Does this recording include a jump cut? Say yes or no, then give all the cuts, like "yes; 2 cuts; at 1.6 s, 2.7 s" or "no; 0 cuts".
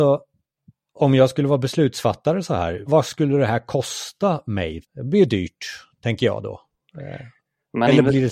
yes; 2 cuts; at 2.9 s, 4.8 s